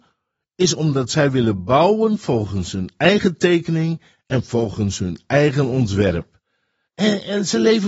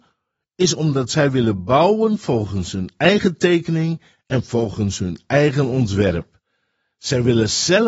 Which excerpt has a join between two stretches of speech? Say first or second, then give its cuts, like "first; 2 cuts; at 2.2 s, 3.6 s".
first; 1 cut; at 6.9 s